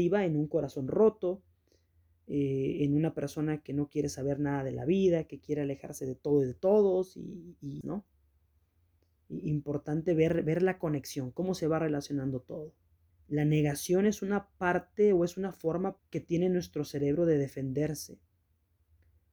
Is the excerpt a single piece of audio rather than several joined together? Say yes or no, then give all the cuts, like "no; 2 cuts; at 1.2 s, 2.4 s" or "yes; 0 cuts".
no; 3 cuts; at 7.8 s, 13.1 s, 16.0 s